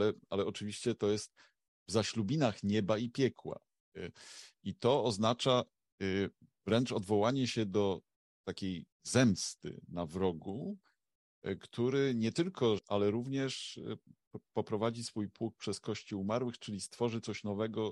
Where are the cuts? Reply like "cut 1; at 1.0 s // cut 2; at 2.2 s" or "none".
cut 1; at 8.9 s // cut 2; at 12.8 s